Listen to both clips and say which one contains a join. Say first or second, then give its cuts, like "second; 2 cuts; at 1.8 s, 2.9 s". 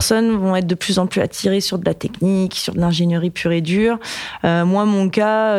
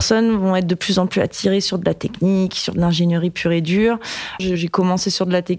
second; 1 cut; at 4.4 s